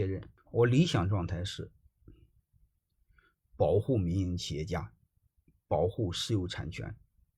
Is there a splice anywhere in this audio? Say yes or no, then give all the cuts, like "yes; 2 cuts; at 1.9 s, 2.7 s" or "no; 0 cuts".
no; 0 cuts